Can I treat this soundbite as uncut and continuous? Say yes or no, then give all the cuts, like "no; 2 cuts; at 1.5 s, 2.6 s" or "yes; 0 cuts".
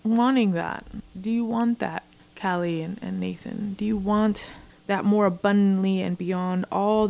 yes; 0 cuts